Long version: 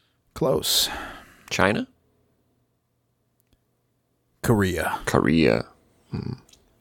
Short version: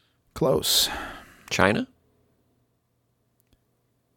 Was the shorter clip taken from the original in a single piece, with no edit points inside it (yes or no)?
yes